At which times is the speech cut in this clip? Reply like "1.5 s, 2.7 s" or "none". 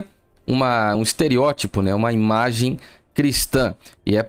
none